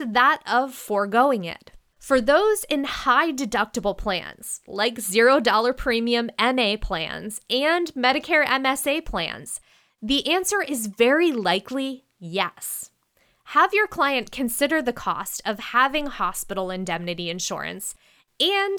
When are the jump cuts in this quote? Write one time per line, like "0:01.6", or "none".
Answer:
0:01.9